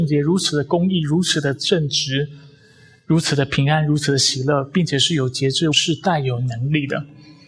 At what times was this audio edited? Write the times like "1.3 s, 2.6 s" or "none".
5.7 s